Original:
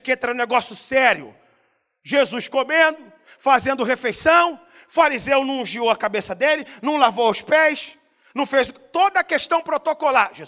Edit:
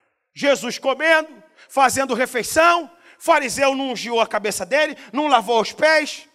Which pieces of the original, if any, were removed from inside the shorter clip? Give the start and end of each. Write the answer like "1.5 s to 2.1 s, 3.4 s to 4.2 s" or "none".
none